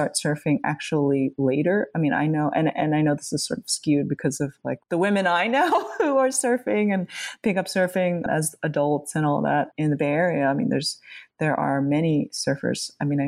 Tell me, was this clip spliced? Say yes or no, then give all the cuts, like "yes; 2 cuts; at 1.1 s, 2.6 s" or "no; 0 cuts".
yes; 1 cut; at 4.8 s